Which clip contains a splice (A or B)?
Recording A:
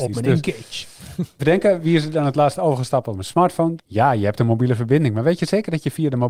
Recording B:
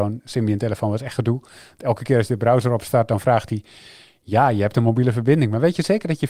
A